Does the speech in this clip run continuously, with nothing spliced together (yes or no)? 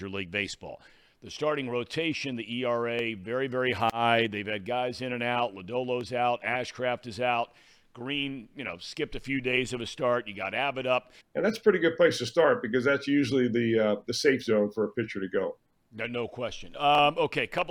no